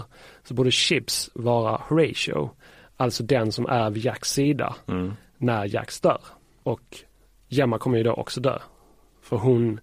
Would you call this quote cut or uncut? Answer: uncut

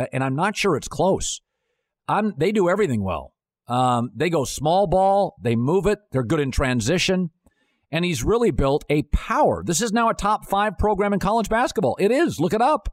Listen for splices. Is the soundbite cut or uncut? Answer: uncut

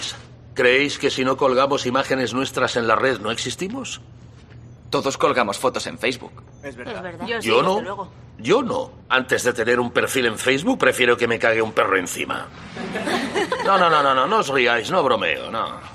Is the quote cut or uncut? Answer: cut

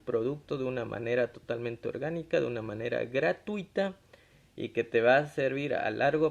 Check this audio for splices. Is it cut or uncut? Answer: uncut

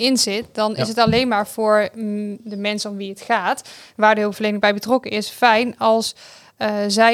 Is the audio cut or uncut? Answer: uncut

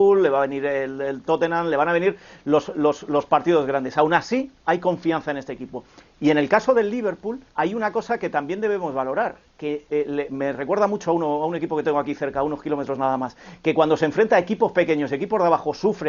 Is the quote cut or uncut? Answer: cut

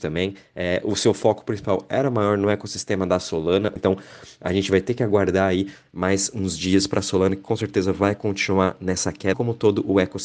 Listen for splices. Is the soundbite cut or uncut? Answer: cut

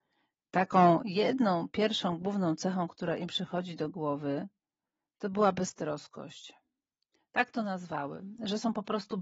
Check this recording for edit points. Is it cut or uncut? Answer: uncut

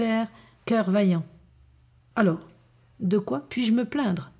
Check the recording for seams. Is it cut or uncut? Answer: cut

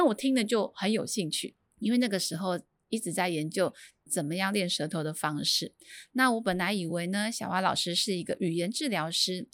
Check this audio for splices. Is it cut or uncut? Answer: uncut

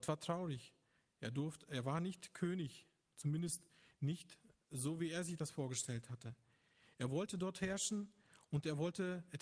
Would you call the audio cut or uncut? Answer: uncut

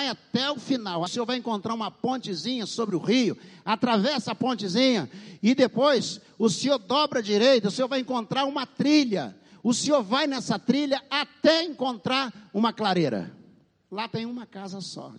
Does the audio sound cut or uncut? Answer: cut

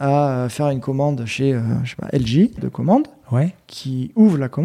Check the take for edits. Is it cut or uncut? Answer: cut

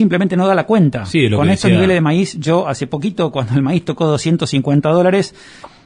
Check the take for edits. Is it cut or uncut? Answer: uncut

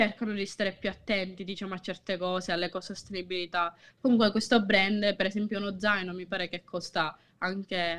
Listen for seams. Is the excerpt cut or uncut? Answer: cut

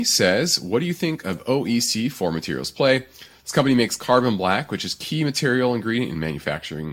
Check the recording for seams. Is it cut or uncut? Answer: uncut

